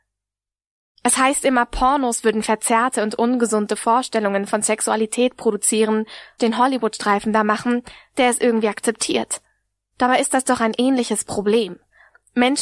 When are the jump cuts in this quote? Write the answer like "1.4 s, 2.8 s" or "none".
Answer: 6.4 s